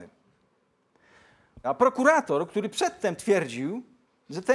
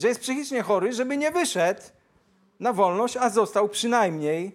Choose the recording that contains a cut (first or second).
first